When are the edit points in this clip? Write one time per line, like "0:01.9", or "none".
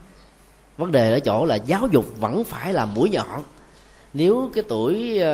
none